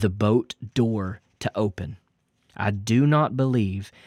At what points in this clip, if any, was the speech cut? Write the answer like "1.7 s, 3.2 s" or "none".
2.5 s